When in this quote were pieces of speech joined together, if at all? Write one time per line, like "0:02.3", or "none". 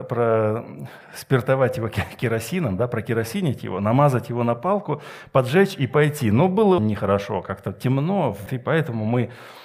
0:06.8
0:08.5